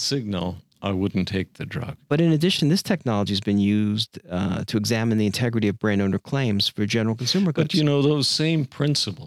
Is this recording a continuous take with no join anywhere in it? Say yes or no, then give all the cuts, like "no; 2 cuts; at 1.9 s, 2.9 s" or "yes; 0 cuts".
yes; 0 cuts